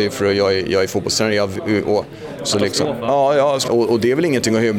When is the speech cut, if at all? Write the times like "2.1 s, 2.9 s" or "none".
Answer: 2.4 s, 3.7 s